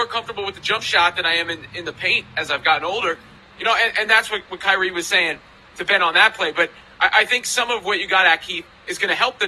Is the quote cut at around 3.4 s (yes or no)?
yes